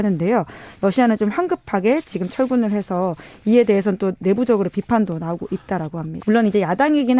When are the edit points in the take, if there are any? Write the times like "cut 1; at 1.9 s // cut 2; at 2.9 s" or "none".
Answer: cut 1; at 6.2 s